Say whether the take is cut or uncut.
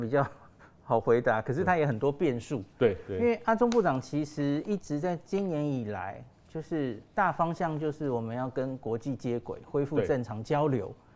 cut